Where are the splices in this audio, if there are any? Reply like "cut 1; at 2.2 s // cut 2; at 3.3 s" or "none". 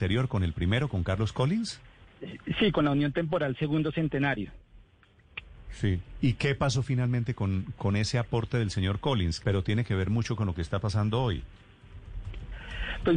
cut 1; at 7.8 s // cut 2; at 9.4 s